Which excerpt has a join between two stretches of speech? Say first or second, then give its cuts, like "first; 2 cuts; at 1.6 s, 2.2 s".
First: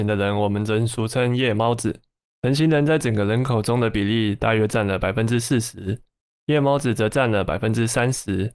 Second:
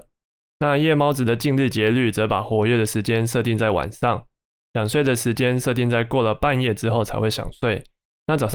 first; 1 cut; at 2.3 s